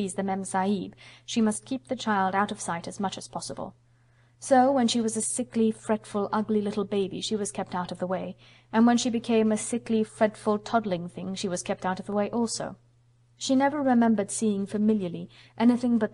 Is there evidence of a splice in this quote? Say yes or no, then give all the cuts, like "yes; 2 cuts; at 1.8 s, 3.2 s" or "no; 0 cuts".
no; 0 cuts